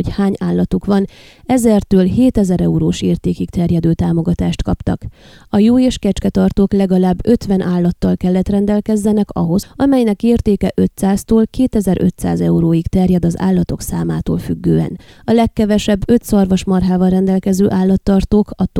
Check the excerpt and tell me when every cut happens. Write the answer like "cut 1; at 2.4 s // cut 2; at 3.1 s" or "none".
cut 1; at 9.6 s // cut 2; at 15.1 s